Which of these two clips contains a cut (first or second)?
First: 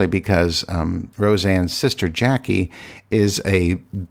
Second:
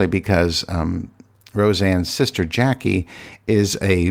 first